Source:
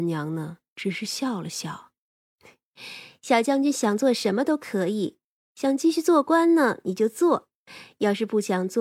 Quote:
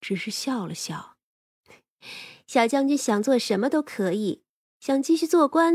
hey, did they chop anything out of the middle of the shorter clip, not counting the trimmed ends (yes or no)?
no